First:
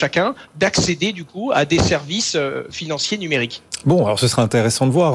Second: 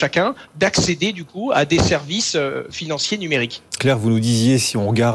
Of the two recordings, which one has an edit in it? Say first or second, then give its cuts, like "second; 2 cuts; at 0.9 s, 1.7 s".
second; 1 cut; at 3.8 s